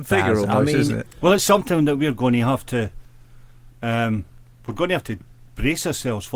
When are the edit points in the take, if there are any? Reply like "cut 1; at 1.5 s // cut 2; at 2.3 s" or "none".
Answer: cut 1; at 1.1 s